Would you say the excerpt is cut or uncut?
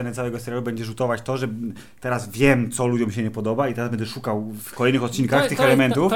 uncut